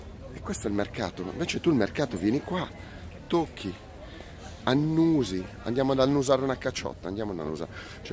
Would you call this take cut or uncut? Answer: uncut